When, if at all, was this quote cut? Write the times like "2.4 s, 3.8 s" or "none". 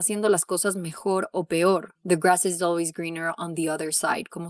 2.0 s